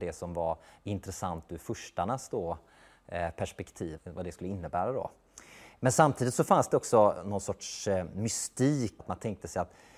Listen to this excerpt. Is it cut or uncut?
cut